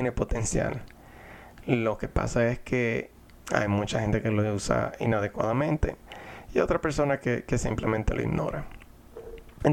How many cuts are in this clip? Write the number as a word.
one